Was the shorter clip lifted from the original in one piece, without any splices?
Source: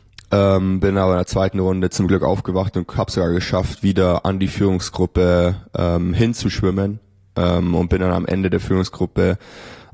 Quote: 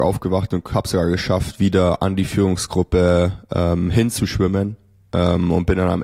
yes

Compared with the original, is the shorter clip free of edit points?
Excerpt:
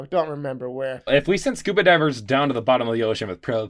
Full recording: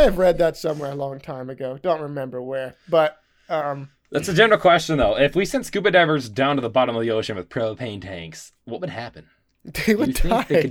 no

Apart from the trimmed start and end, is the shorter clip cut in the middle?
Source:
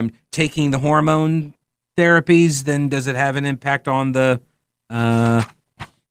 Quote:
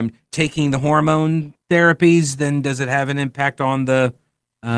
yes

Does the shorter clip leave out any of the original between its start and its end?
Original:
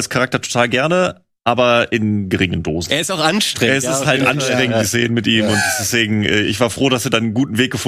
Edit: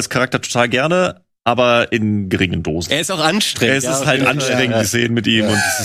no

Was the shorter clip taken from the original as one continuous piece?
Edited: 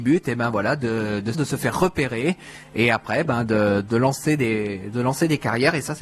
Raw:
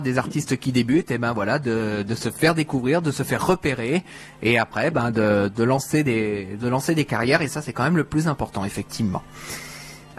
no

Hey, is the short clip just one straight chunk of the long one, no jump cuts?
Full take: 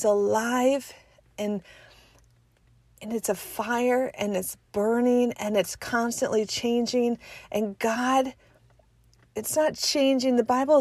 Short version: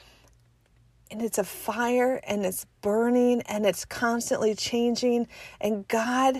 yes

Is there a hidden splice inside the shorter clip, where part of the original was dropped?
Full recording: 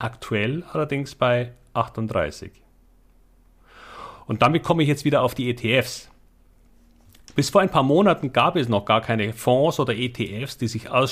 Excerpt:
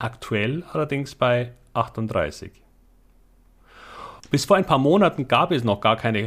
yes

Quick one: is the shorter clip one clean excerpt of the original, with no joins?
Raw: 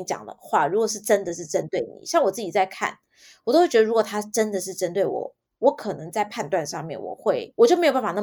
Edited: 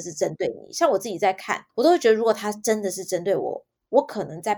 no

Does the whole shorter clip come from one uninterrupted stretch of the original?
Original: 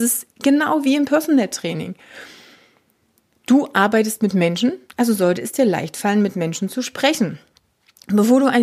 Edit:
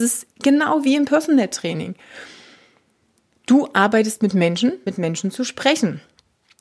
no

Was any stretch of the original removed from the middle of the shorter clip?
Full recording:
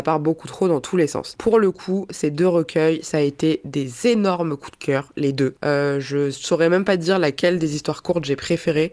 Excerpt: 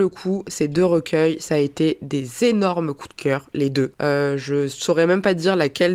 no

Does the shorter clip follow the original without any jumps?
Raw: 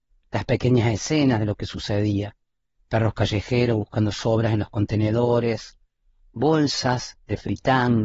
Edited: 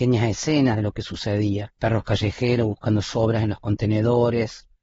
no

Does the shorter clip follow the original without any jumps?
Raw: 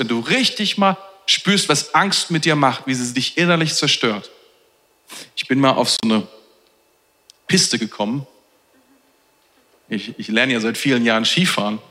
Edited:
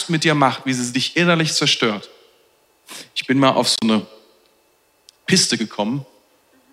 yes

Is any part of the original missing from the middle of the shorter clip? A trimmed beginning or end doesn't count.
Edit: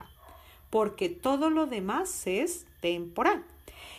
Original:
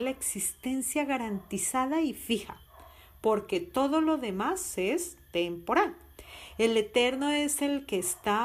no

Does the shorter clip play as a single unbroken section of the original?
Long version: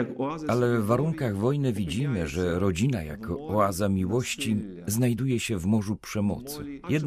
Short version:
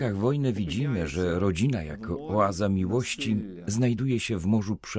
yes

